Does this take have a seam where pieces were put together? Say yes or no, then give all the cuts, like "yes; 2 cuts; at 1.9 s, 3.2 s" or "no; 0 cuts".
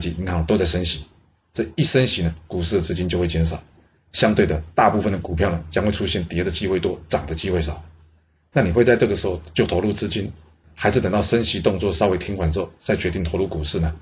no; 0 cuts